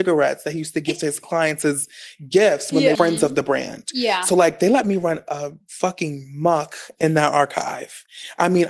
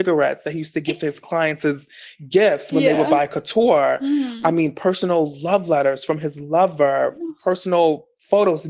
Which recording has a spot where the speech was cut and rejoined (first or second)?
first